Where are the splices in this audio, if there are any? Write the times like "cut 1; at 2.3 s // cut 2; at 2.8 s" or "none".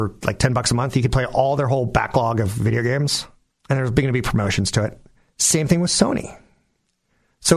cut 1; at 3.5 s